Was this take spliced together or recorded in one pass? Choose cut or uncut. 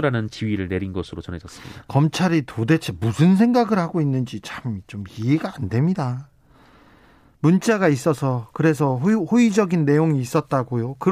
uncut